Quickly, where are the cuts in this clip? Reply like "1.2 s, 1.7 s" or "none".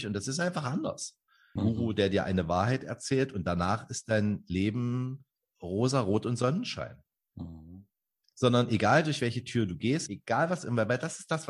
1.6 s, 10.1 s